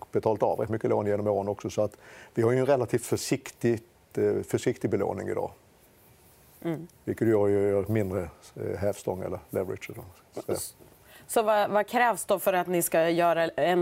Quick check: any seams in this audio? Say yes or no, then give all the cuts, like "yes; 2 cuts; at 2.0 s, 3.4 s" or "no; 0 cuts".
no; 0 cuts